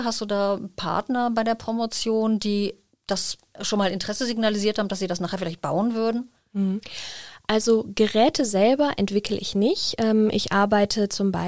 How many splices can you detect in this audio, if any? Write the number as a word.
zero